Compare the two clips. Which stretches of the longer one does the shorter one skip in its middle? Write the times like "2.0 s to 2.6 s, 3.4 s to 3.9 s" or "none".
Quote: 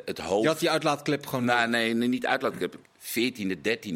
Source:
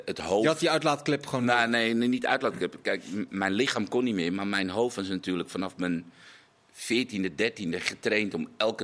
2.8 s to 6.6 s